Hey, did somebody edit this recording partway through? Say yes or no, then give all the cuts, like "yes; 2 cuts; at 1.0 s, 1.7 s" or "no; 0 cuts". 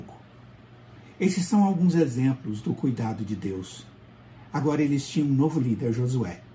yes; 1 cut; at 4.5 s